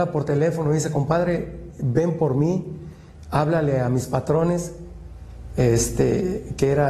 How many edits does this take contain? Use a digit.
0